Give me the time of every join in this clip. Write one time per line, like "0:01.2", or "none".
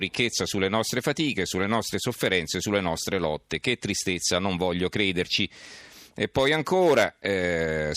none